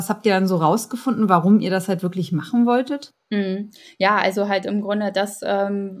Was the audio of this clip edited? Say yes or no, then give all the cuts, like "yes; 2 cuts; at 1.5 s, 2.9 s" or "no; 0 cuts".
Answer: no; 0 cuts